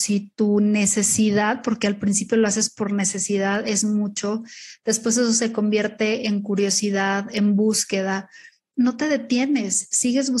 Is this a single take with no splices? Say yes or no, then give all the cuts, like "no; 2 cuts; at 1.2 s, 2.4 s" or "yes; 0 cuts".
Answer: no; 1 cut; at 8.7 s